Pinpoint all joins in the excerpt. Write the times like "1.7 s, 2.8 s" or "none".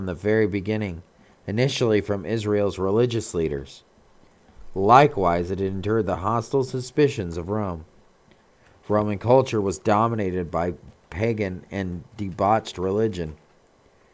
none

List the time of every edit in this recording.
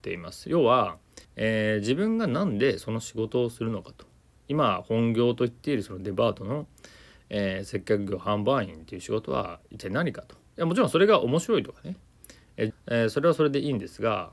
1.2 s, 12.7 s

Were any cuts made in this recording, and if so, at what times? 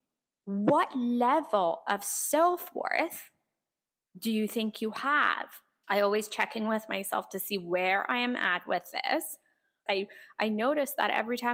5.8 s, 9.9 s

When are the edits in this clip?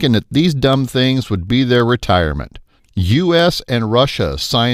2.8 s

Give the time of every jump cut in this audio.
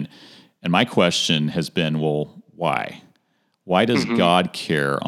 none

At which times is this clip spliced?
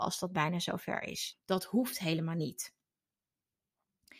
1.3 s

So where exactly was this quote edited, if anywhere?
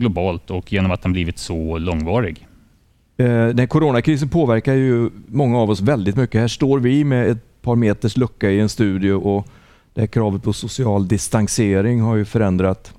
none

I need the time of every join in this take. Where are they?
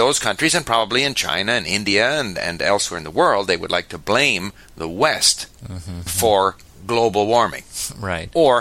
6.1 s

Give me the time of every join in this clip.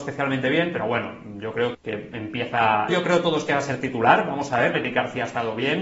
1.7 s, 2.9 s, 4.7 s

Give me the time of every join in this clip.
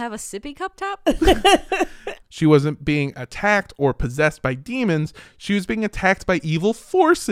2.2 s

